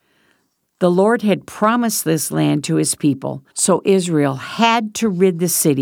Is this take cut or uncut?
cut